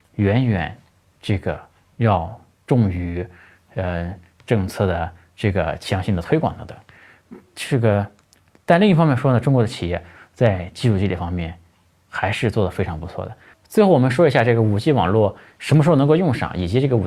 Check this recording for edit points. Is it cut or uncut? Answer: cut